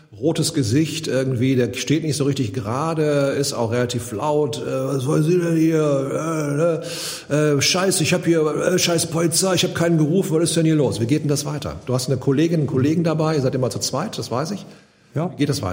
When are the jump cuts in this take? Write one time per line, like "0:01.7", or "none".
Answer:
none